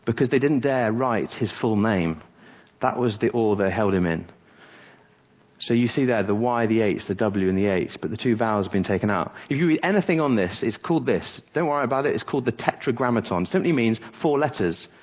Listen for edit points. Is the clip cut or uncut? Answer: uncut